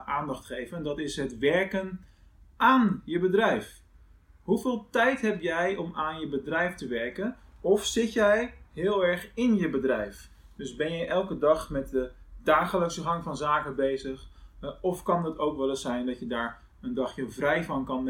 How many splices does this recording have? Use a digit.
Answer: 0